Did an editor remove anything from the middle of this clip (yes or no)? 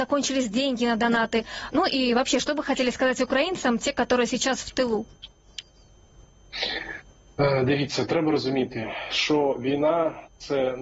yes